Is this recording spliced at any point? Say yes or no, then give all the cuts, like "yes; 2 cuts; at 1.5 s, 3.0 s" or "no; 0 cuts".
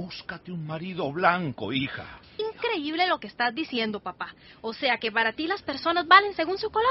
yes; 1 cut; at 2.4 s